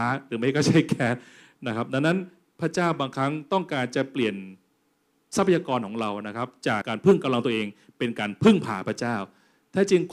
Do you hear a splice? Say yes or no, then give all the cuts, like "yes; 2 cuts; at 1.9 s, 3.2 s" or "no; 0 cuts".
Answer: yes; 1 cut; at 6.8 s